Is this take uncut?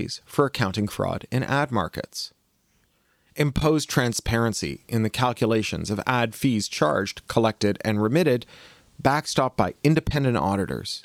yes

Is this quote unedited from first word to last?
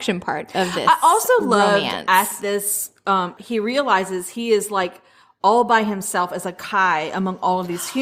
no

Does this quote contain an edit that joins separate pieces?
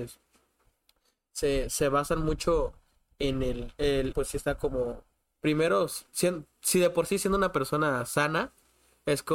yes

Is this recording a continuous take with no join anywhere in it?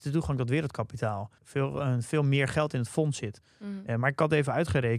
no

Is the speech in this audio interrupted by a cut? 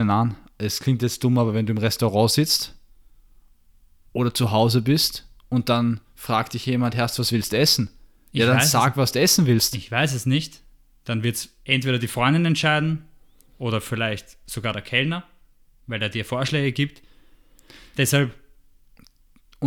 no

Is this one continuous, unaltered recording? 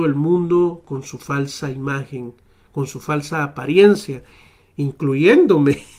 yes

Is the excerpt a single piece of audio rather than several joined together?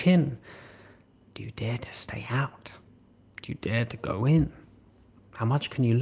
yes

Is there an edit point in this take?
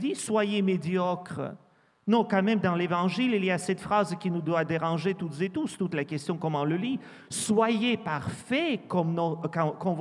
no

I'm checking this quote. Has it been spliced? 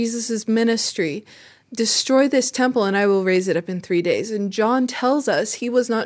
yes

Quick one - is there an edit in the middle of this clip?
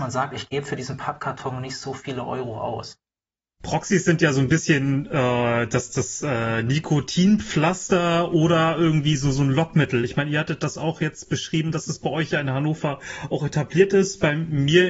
no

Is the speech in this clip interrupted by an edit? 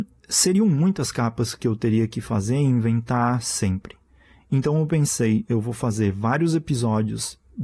no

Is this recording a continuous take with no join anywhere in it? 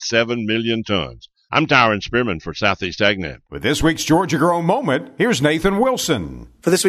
yes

